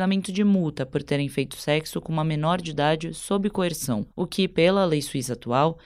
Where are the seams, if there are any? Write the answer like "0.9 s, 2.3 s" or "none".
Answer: none